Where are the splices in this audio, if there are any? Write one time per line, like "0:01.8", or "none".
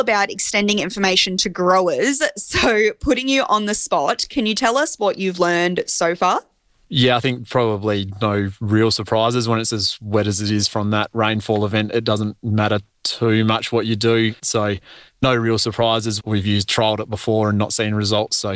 0:14.4
0:16.2

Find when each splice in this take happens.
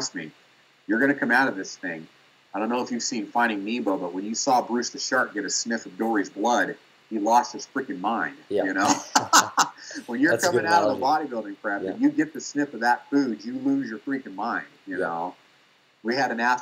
none

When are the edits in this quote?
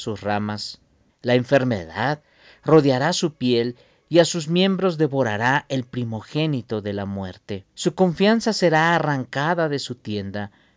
0:01.1
0:07.7

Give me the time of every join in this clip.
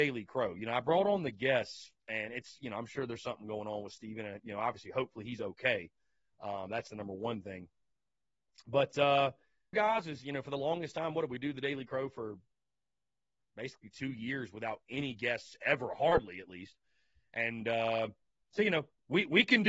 0:09.7

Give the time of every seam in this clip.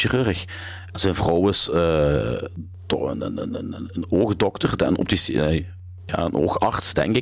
none

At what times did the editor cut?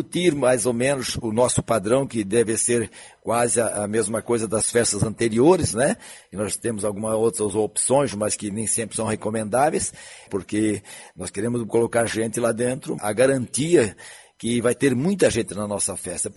0:10.3
0:13.0

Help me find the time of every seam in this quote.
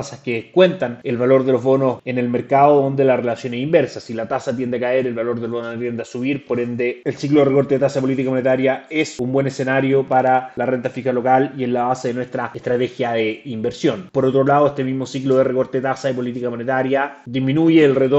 none

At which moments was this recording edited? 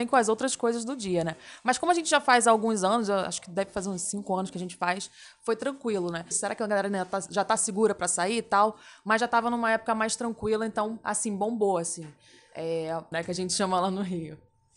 0:06.3
0:13.1

